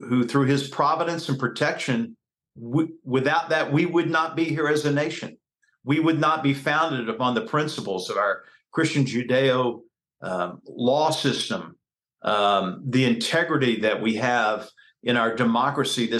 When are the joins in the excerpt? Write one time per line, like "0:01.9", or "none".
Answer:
none